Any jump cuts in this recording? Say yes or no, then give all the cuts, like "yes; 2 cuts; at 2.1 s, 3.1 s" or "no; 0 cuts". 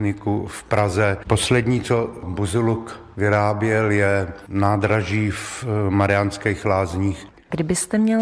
yes; 1 cut; at 1.2 s